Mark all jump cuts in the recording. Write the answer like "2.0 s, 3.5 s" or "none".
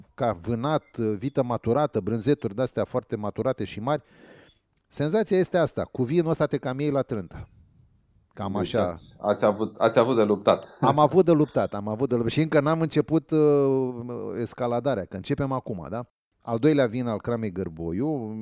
16.3 s

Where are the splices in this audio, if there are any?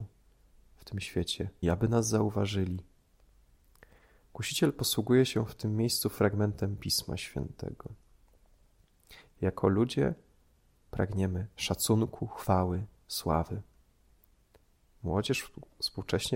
1.6 s, 9.3 s

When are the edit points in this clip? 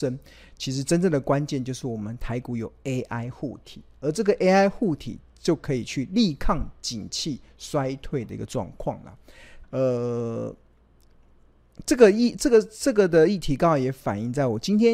9.6 s

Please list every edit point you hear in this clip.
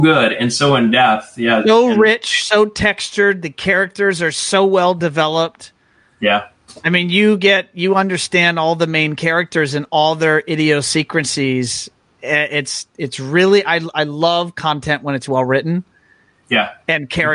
none

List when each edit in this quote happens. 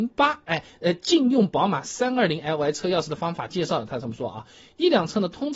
none

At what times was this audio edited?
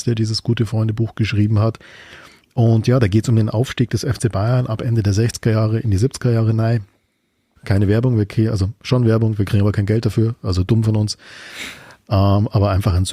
7.6 s

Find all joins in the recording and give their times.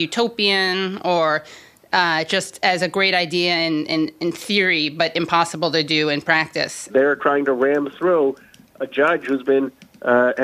6.9 s

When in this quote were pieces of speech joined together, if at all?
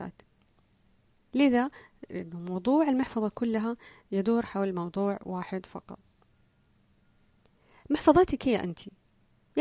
none

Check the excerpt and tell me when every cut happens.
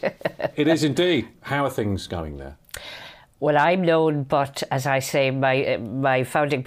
1.3 s

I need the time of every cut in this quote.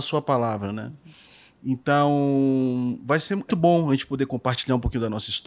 3.5 s

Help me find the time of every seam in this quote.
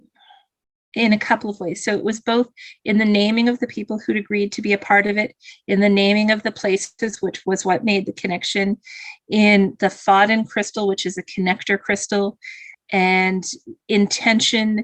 12.7 s

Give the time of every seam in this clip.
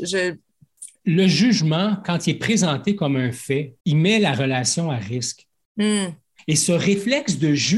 1.0 s, 3.8 s, 6.4 s

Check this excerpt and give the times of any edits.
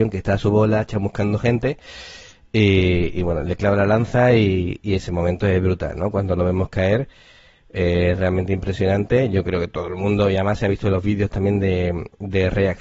none

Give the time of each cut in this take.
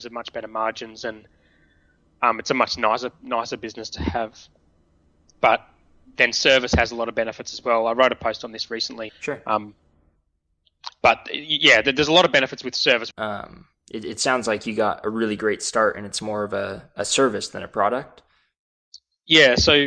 9.1 s, 13.1 s

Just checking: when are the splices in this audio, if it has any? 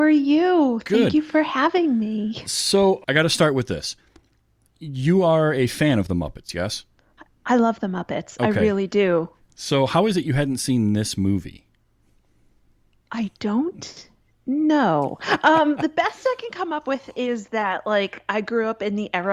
3.0 s

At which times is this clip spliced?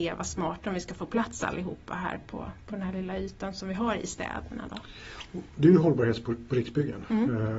none

